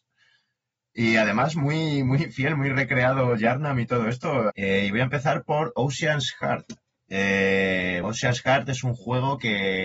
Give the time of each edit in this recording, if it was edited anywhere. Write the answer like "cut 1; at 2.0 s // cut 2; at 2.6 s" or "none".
cut 1; at 4.5 s // cut 2; at 8.0 s